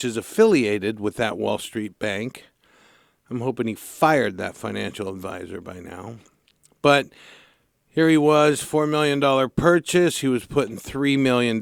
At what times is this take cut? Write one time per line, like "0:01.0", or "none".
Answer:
none